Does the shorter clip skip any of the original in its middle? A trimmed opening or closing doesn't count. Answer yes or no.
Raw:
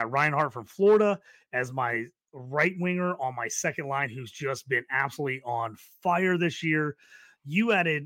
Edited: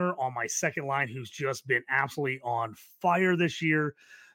no